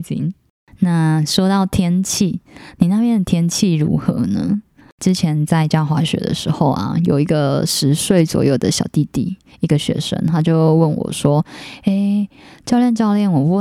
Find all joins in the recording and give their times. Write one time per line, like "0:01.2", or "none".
none